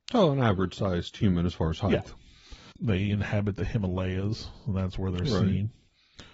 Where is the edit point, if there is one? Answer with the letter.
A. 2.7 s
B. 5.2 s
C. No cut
A